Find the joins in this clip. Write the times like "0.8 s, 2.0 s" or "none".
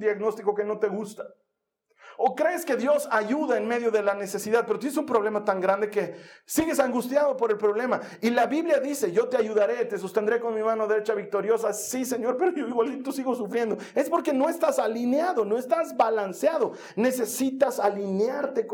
none